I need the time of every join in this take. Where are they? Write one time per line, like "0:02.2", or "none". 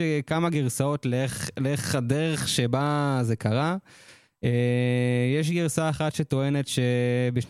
none